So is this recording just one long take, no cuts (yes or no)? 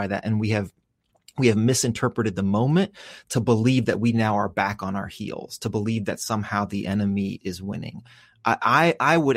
no